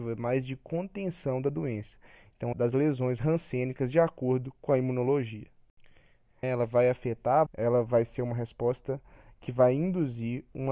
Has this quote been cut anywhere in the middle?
yes; 3 cuts; at 2.5 s, 6.4 s, 7.5 s

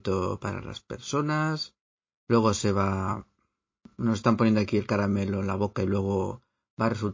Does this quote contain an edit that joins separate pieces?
no; 0 cuts

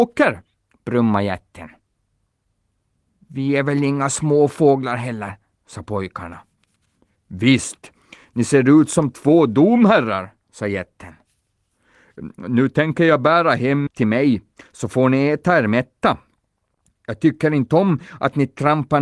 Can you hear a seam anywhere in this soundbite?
yes; 1 cut; at 13.9 s

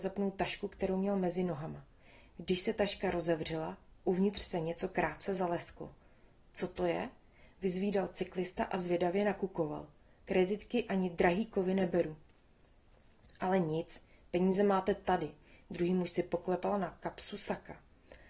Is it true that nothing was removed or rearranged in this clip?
yes; 0 cuts

